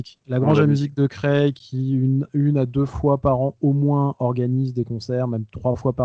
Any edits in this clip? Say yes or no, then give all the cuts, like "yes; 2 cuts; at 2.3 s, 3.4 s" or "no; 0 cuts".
no; 0 cuts